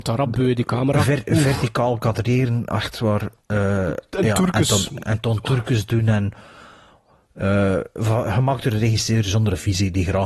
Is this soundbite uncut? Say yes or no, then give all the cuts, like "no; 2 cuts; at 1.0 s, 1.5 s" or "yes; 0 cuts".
yes; 0 cuts